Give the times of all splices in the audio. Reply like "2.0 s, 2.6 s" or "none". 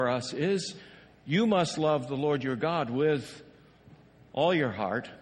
none